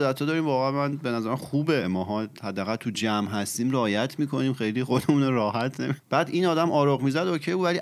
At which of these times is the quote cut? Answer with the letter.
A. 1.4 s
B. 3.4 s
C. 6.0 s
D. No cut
C